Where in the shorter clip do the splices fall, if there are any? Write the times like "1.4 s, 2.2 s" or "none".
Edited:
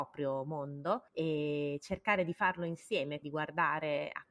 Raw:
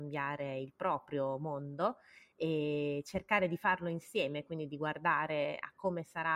1.1 s, 3.2 s